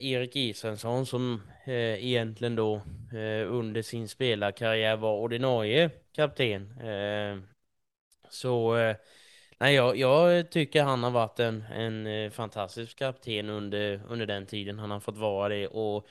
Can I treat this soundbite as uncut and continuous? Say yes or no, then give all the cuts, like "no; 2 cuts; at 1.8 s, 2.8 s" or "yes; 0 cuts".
yes; 0 cuts